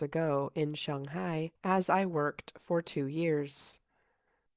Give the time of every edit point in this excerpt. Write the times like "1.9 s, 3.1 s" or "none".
1.6 s